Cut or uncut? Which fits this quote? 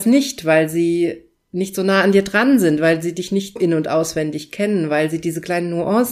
cut